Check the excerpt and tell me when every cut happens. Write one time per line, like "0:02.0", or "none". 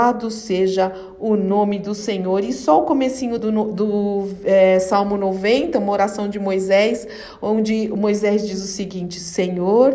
none